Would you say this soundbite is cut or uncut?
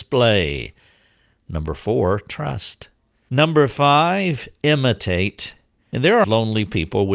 cut